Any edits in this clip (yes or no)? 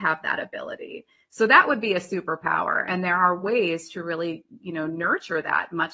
no